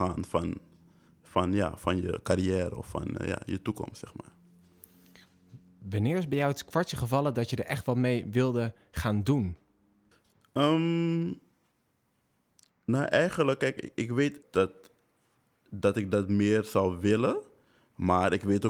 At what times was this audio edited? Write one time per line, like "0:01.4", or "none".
0:14.4